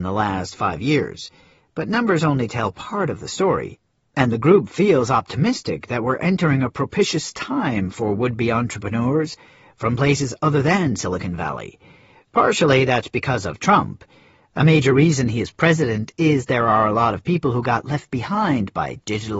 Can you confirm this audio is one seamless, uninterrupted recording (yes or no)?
yes